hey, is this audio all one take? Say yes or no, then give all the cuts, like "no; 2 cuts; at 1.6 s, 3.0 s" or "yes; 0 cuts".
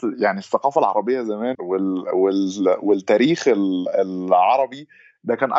no; 1 cut; at 1.5 s